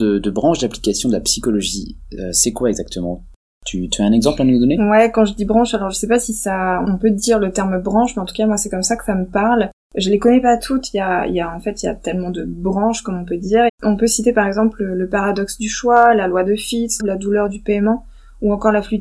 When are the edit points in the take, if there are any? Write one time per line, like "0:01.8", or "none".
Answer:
0:06.8
0:13.7
0:17.0